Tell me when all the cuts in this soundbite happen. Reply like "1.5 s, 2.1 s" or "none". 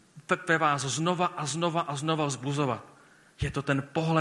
none